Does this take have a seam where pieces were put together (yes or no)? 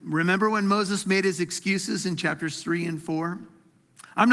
no